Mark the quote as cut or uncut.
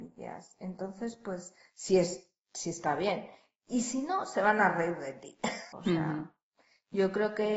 cut